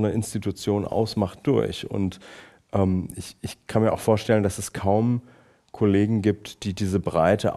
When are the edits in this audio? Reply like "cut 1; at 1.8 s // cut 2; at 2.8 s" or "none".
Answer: none